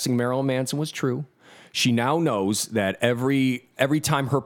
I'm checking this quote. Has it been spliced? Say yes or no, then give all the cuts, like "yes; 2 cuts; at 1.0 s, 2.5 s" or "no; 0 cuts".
no; 0 cuts